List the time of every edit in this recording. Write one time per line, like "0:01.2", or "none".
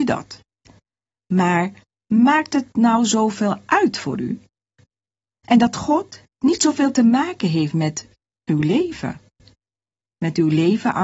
0:05.4